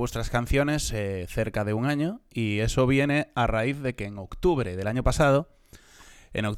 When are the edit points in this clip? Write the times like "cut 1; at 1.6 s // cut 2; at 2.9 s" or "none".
none